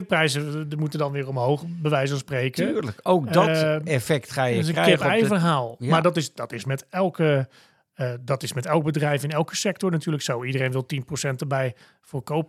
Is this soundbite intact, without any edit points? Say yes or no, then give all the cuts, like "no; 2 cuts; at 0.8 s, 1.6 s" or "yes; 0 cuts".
yes; 0 cuts